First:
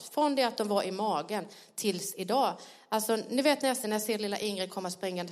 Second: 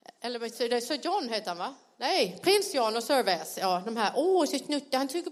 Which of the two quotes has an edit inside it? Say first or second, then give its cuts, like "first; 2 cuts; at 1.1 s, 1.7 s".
first; 1 cut; at 3.8 s